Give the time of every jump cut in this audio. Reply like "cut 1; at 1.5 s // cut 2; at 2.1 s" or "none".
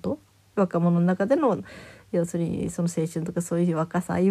none